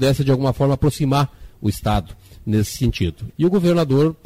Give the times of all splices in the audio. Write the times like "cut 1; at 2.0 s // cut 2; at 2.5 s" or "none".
cut 1; at 3.3 s